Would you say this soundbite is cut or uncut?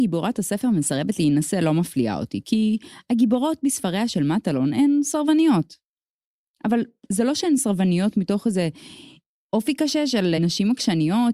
cut